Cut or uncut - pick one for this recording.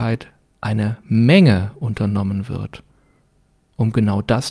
uncut